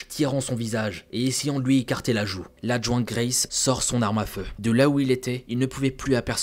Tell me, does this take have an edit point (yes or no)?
yes